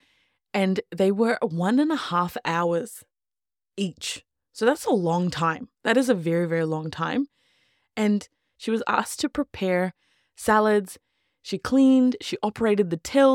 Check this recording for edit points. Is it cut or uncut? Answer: uncut